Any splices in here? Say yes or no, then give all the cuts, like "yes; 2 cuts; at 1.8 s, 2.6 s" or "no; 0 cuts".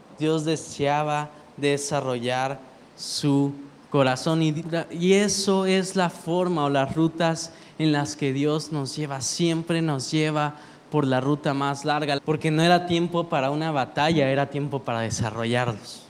yes; 2 cuts; at 4.6 s, 12.2 s